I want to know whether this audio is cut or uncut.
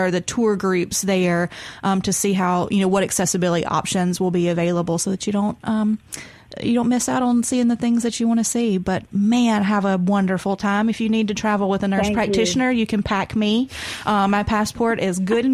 uncut